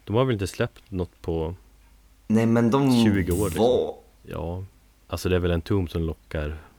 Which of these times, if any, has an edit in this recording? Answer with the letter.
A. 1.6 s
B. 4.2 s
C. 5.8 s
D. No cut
B